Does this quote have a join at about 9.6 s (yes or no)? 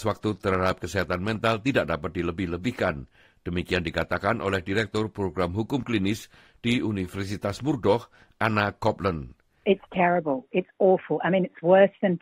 yes